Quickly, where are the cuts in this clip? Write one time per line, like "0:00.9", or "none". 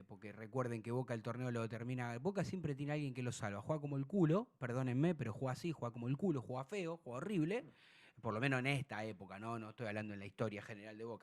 none

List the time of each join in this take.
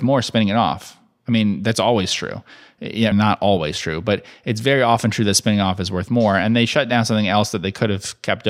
0:03.1

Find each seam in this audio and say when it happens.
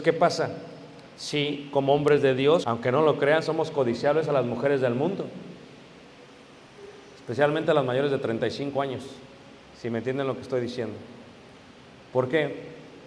0:02.6

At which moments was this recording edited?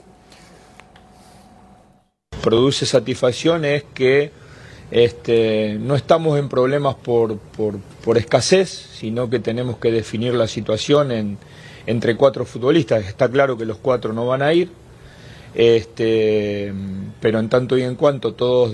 none

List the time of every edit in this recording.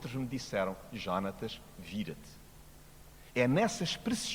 0:03.3

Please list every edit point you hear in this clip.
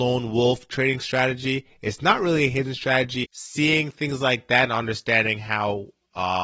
0:03.2

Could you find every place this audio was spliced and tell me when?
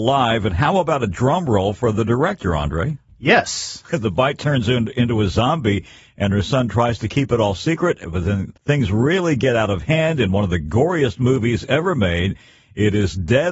0:03.8

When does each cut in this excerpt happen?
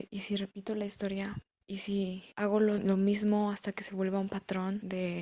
none

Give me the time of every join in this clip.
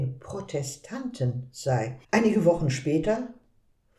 0:02.0

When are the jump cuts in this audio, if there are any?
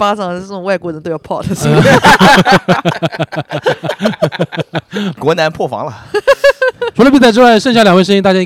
none

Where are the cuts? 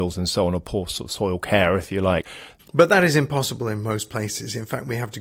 0:02.6

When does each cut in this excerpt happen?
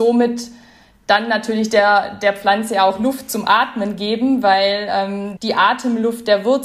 0:05.4

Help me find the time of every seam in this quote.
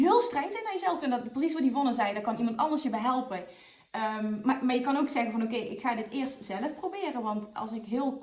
none

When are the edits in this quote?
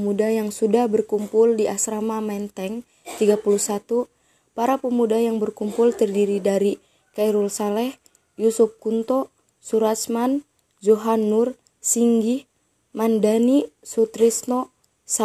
none

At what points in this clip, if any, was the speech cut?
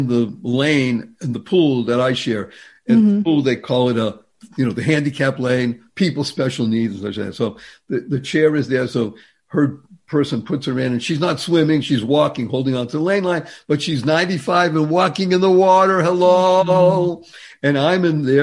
none

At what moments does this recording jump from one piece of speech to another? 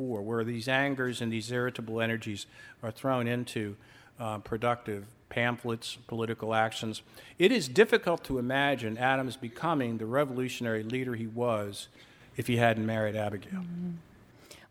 none

